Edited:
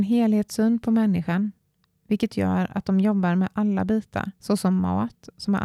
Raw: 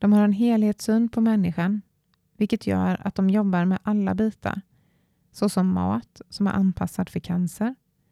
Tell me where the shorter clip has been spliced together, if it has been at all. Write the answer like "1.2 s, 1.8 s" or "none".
4.4 s